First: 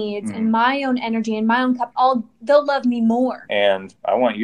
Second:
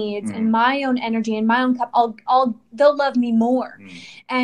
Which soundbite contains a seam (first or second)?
first